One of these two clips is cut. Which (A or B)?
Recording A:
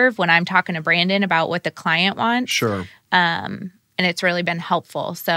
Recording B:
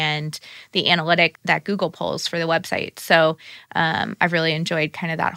B